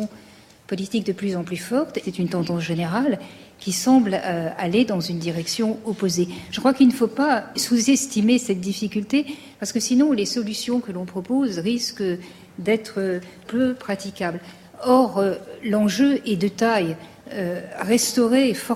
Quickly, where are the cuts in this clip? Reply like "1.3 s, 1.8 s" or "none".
2.0 s

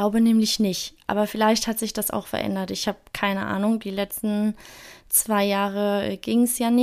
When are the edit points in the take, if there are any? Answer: none

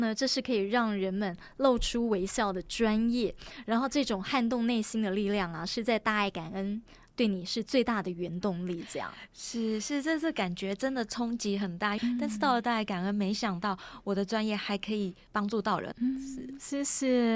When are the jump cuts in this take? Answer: 12.0 s, 15.9 s

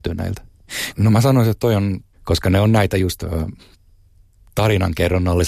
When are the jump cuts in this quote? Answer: 0.9 s, 2.1 s

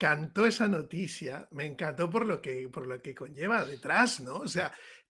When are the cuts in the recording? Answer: none

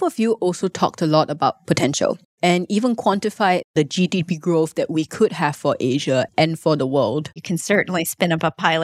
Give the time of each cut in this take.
7.4 s

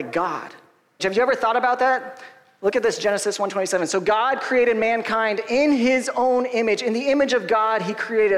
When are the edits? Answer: 1.0 s

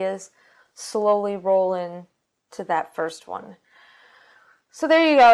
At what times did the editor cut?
none

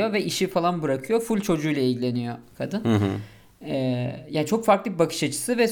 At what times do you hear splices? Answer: none

